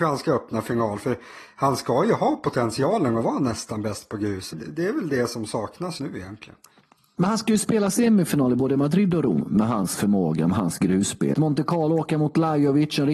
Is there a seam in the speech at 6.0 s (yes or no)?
yes